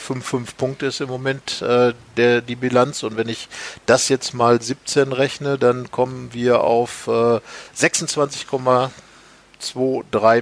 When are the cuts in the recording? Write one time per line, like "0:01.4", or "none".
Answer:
none